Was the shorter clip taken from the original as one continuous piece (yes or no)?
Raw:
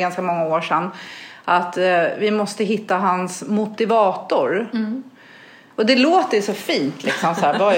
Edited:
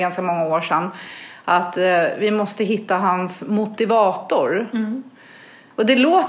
yes